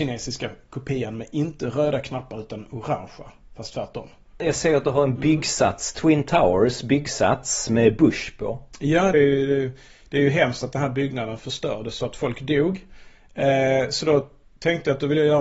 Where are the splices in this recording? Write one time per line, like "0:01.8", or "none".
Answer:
0:09.1